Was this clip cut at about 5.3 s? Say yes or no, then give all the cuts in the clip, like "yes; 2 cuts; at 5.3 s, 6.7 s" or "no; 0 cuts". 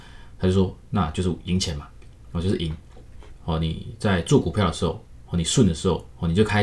no; 1 cut; at 3.4 s